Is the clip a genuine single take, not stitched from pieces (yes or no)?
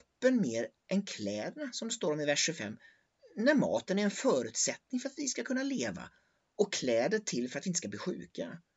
yes